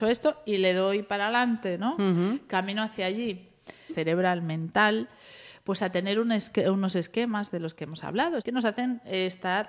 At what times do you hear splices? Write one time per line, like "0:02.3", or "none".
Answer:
0:03.9
0:08.4